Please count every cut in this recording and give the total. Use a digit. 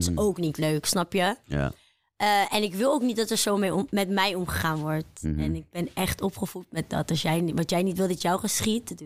0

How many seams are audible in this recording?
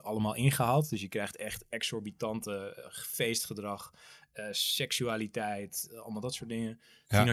0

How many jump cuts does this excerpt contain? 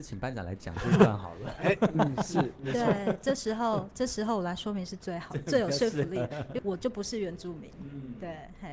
1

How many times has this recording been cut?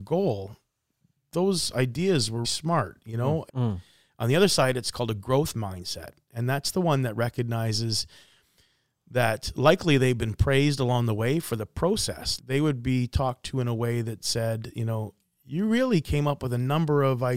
3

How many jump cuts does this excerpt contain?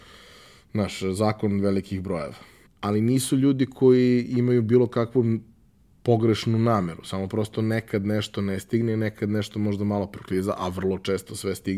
1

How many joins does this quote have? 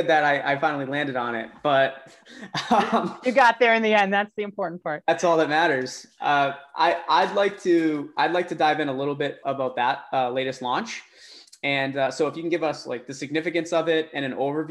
1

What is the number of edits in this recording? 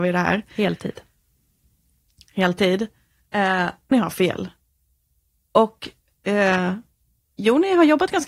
1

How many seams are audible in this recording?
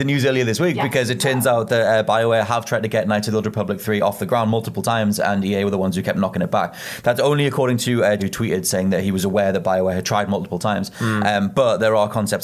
1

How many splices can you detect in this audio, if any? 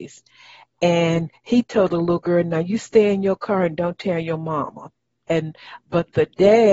1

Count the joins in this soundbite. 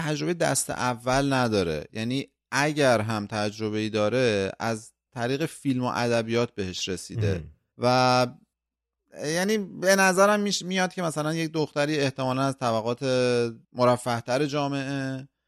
2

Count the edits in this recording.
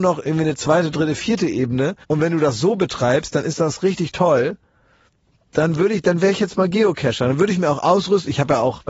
1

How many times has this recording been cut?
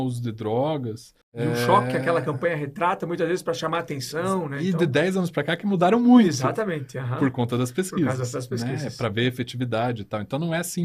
1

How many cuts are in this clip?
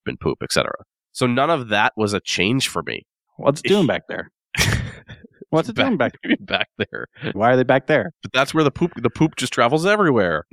3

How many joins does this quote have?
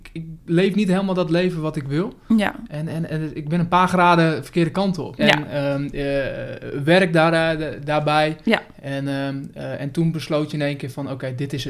2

